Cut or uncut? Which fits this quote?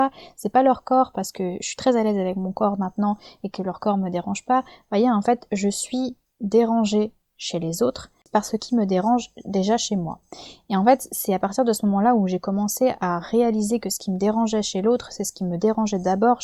uncut